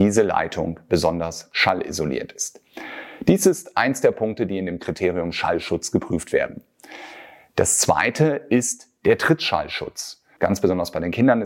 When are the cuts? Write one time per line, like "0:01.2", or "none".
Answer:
0:10.4